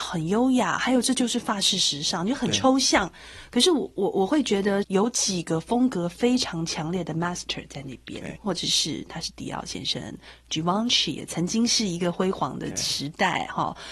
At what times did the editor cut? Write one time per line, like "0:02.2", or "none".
0:04.8
0:08.4